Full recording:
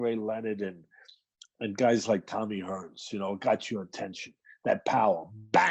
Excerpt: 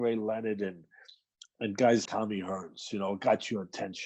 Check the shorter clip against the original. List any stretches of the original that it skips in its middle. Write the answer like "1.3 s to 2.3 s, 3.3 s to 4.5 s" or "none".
2.1 s to 2.3 s